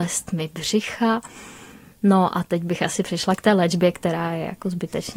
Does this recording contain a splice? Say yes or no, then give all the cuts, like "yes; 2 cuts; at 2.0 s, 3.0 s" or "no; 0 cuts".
no; 0 cuts